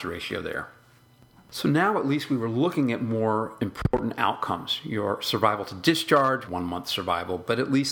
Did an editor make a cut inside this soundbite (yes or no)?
yes